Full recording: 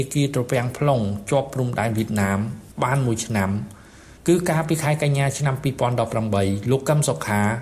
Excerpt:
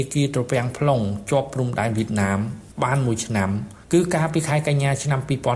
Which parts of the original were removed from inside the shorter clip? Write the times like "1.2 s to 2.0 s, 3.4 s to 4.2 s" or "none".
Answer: 3.8 s to 4.2 s